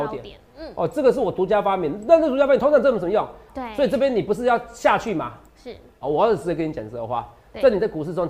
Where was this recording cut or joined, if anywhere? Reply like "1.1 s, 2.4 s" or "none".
3.5 s, 6.0 s